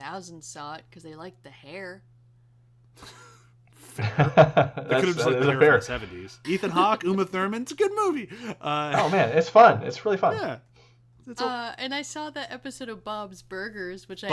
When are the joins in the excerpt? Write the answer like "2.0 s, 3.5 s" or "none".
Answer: 6.4 s